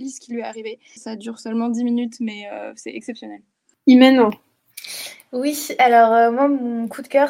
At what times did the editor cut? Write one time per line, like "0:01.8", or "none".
0:01.0